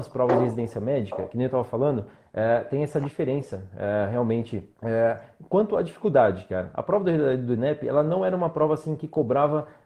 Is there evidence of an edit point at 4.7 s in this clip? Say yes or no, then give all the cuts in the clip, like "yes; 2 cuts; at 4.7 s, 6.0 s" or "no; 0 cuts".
yes; 1 cut; at 4.7 s